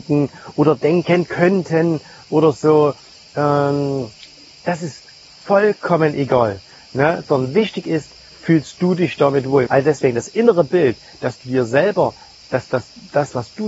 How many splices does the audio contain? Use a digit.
1